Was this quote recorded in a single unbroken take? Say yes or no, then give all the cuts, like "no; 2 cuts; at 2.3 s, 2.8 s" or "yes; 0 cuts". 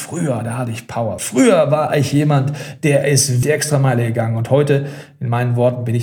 no; 2 cuts; at 1.2 s, 3.4 s